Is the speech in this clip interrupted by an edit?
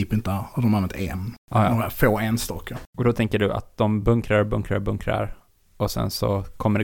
no; 0 cuts

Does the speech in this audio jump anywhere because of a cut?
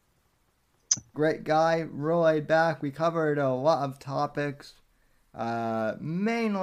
yes; 1 cut; at 1.1 s

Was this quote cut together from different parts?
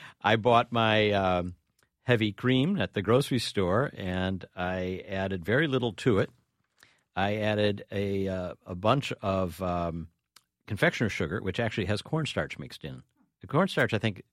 no; 0 cuts

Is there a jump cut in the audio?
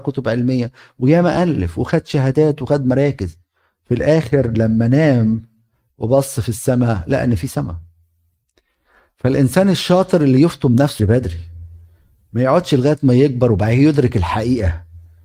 yes; 1 cut; at 11.0 s

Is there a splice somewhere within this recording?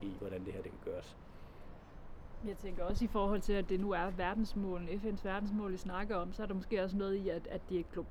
no; 0 cuts

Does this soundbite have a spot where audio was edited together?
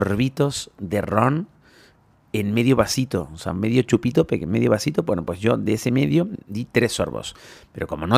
no; 0 cuts

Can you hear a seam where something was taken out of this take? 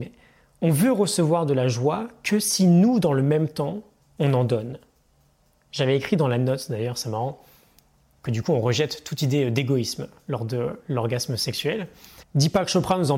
yes; 1 cut; at 12.2 s

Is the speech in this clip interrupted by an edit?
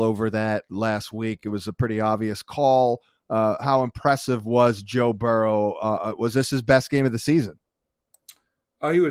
no; 0 cuts

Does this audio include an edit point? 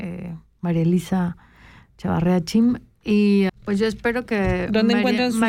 yes; 1 cut; at 3.5 s

